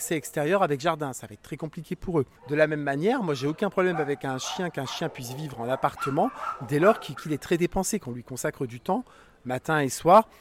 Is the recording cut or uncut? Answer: cut